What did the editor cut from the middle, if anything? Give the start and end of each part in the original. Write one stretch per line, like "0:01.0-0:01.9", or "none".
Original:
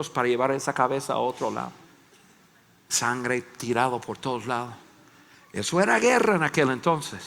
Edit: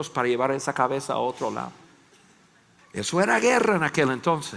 0:02.8-0:05.4